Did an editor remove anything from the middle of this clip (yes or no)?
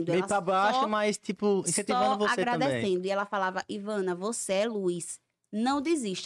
no